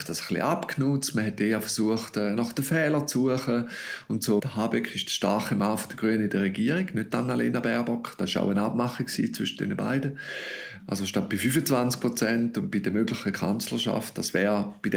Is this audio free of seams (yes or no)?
no